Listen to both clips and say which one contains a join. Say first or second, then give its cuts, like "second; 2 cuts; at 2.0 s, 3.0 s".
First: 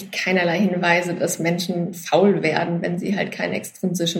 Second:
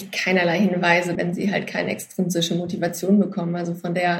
second; 1 cut; at 1.2 s